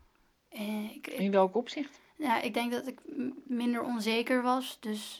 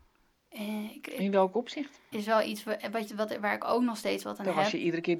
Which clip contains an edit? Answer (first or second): second